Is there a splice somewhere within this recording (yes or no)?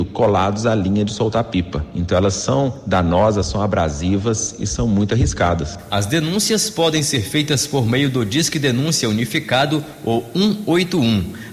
no